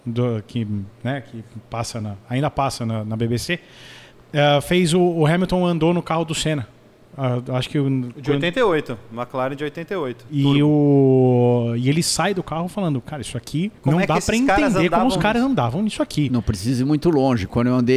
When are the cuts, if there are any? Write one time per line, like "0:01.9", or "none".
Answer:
0:13.8